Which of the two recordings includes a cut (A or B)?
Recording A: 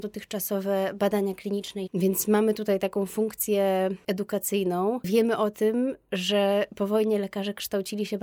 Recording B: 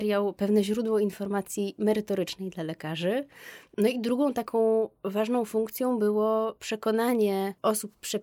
A